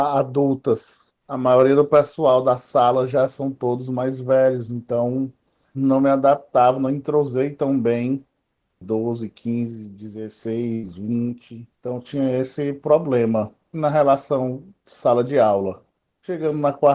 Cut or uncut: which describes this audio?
cut